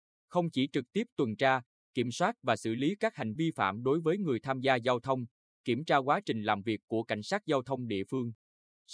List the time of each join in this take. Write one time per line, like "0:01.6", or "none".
0:03.4
0:05.4